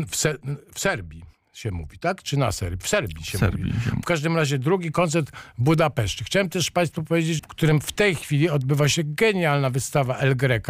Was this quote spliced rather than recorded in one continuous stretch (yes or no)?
yes